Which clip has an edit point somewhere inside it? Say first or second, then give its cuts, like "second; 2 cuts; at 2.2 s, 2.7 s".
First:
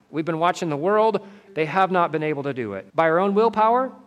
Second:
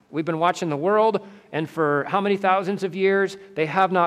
first; 2 cuts; at 1.5 s, 2.9 s